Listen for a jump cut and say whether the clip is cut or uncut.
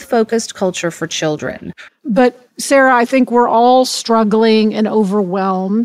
cut